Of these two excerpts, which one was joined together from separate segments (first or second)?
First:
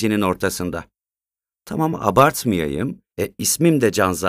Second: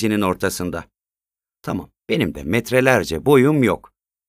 first